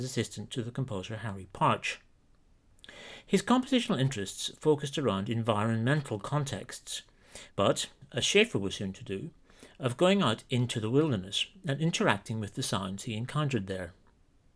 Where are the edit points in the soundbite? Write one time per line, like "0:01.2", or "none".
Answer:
0:07.5